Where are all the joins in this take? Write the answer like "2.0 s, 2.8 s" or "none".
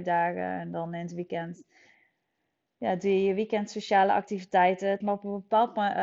5.0 s